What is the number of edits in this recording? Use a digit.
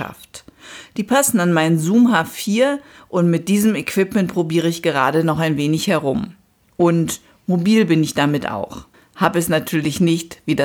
0